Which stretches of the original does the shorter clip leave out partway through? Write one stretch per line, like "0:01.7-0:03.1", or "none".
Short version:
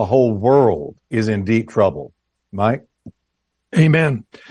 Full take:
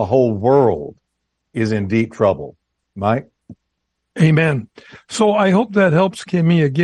0:01.0-0:01.5